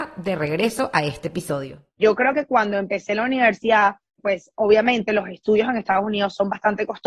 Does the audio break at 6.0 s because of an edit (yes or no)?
no